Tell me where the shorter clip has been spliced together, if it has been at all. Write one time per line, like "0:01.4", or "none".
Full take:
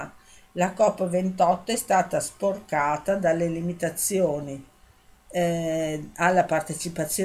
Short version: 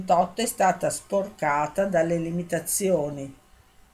none